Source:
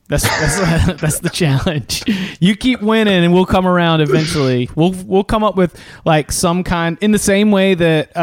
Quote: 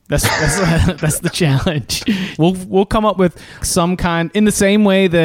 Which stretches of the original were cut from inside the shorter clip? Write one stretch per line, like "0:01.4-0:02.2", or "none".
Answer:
0:02.4-0:04.7
0:06.0-0:06.3